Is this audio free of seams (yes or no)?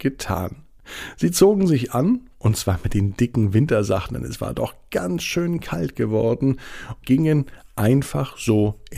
no